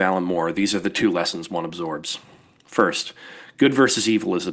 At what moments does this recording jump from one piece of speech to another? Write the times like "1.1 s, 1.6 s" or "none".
none